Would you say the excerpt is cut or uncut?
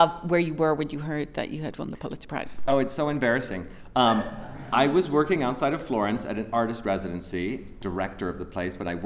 uncut